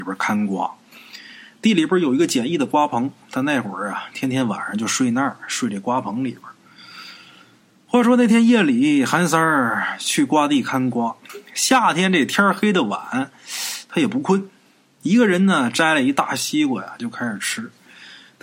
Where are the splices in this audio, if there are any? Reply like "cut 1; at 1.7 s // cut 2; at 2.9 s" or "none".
none